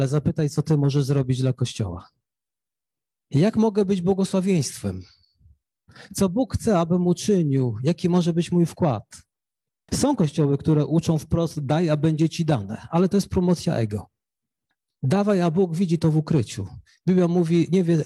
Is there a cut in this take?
no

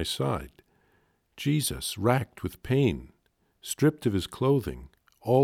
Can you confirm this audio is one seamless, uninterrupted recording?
yes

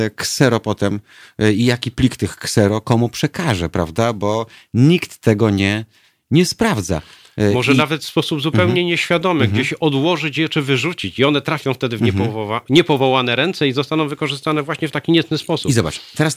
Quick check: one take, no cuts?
yes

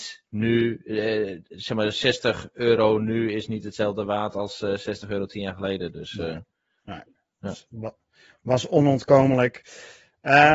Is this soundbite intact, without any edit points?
yes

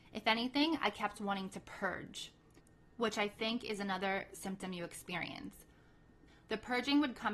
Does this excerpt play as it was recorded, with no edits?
no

